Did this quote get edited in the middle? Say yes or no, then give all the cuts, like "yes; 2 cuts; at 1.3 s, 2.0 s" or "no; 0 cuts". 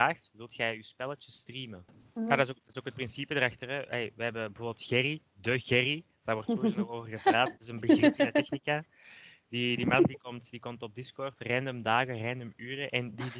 yes; 1 cut; at 1.9 s